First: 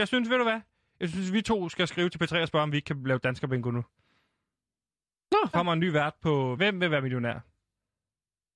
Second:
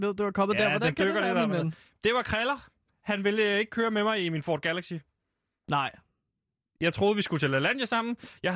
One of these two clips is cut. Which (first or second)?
first